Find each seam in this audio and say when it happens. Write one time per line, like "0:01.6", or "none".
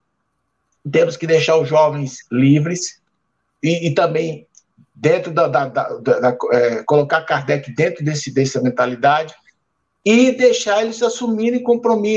none